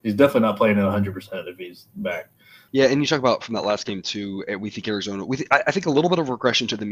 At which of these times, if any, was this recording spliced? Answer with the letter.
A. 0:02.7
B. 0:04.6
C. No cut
A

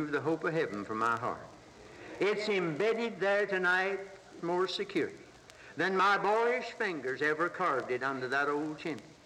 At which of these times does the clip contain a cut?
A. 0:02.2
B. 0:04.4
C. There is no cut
B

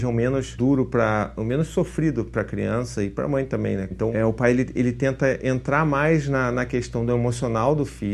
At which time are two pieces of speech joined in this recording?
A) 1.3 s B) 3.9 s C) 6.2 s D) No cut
B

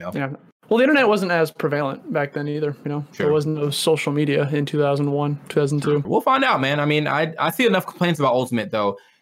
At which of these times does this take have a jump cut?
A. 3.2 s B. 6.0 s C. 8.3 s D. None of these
B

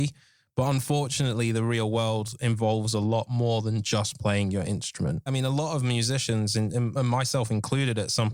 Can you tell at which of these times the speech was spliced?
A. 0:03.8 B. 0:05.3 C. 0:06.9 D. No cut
B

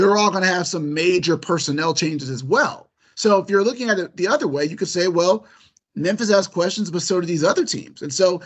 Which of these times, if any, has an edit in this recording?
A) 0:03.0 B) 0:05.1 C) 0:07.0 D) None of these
D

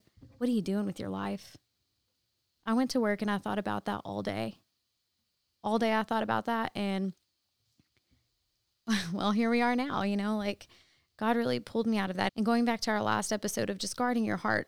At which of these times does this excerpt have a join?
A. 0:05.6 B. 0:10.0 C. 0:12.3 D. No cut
C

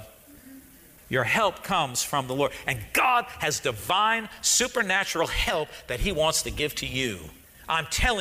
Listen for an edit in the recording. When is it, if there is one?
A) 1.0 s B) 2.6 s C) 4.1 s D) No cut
A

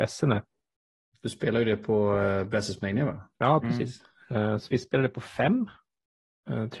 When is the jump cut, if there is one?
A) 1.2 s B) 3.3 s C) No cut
C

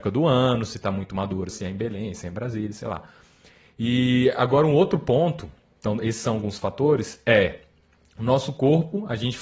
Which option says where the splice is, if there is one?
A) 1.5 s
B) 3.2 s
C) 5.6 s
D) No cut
A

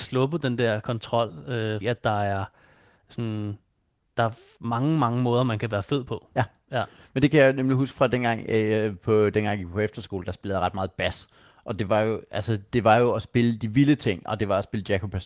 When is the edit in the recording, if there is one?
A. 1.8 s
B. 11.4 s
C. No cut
A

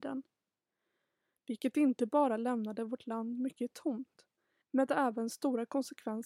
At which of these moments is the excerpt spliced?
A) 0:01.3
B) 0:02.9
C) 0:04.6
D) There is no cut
C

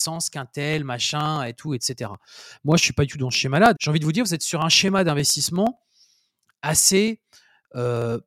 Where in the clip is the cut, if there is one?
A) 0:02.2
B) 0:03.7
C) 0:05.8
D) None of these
B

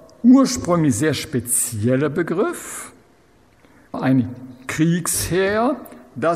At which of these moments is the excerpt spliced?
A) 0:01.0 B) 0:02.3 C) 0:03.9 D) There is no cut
C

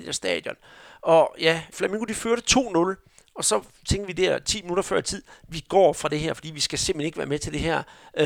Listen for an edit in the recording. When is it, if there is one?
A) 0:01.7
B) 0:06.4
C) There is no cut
A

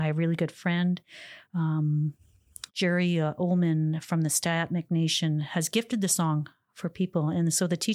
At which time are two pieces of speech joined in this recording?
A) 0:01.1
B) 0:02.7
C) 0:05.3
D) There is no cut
B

